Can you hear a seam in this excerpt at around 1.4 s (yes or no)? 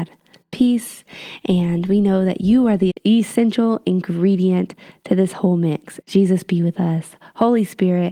no